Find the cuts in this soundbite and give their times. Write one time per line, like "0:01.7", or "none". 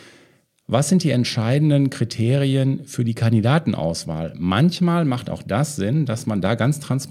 none